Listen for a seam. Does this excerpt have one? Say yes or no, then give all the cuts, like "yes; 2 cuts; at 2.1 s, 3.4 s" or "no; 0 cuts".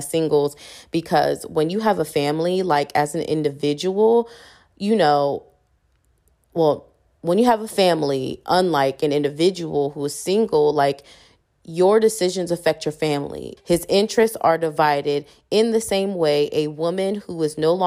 yes; 1 cut; at 13.6 s